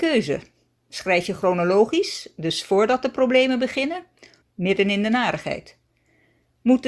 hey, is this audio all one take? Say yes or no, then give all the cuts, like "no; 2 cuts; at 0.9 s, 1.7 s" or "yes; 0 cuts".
no; 1 cut; at 4.4 s